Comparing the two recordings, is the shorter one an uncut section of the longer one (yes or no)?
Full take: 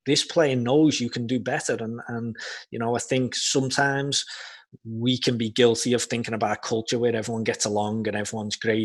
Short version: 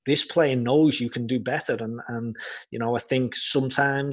yes